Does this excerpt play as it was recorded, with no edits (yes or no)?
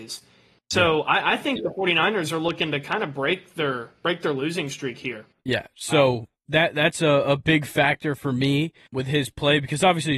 no